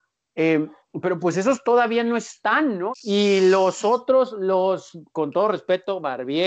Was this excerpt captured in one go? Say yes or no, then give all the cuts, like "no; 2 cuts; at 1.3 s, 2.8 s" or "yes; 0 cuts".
no; 1 cut; at 2.9 s